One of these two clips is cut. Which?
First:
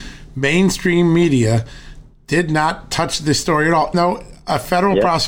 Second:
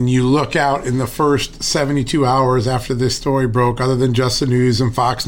first; 1 cut; at 3.9 s

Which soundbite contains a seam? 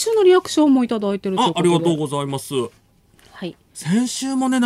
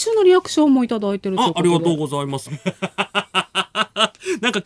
second; 1 cut; at 2.5 s

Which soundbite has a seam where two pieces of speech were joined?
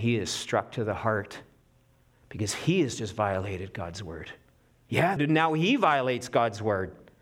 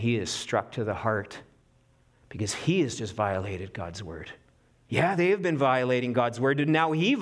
first; 1 cut; at 5.2 s

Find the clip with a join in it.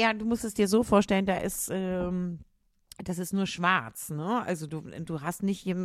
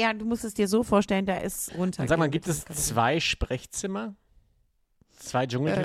second; 1 cut; at 1.7 s

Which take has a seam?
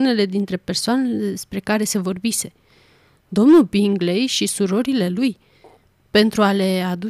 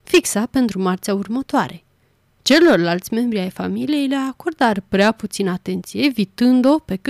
second; 1 cut; at 2.3 s

